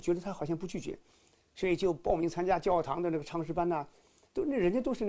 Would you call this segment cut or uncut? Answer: uncut